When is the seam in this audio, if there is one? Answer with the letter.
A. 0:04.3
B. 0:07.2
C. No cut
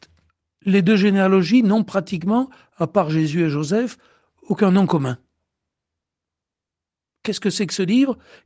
C